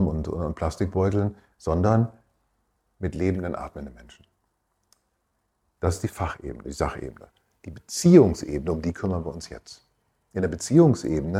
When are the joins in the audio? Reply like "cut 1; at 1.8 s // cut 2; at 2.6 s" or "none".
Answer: none